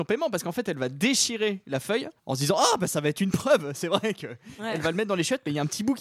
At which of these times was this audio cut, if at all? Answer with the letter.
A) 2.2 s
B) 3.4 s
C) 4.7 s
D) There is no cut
A